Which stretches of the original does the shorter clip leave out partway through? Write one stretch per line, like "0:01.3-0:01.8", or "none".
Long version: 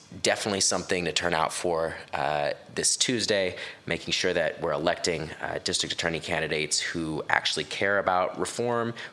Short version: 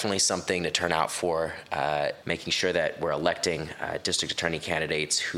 0:02.6-0:03.8